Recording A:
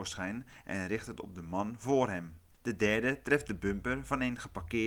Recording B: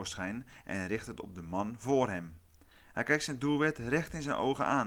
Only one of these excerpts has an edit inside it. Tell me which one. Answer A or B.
A